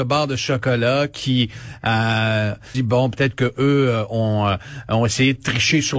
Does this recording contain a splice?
yes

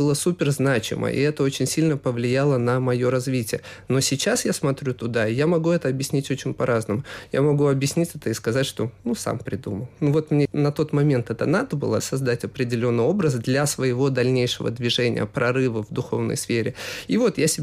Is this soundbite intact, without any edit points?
yes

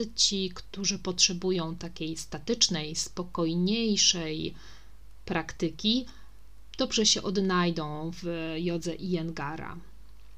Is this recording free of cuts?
yes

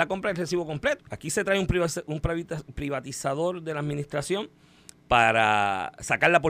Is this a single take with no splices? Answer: no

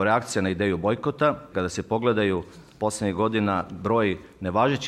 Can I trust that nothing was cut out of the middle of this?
no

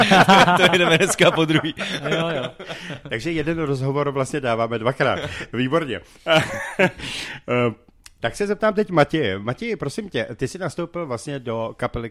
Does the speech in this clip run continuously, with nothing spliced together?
yes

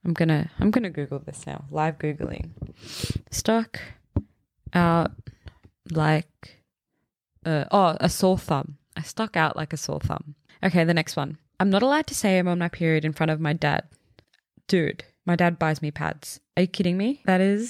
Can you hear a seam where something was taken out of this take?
no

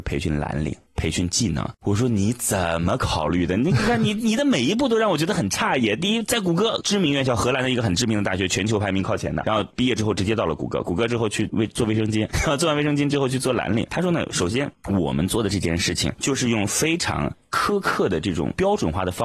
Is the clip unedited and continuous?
yes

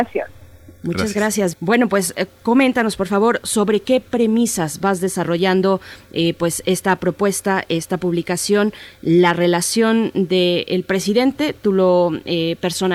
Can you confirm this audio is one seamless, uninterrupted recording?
no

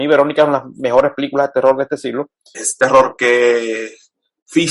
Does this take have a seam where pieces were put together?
yes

